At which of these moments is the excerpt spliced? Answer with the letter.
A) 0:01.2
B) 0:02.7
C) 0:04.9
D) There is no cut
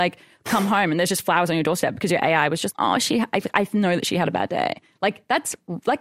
B